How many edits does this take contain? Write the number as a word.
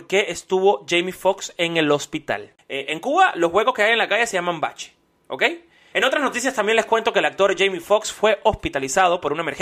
two